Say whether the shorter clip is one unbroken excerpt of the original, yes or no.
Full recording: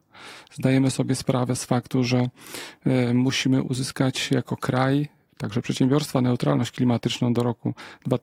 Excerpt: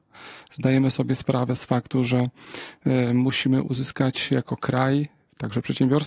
yes